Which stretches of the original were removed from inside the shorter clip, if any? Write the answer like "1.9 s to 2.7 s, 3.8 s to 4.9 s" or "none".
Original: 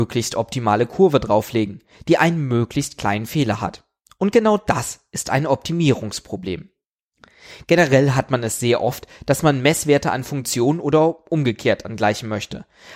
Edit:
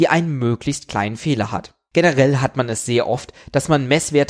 4.0 s to 7.7 s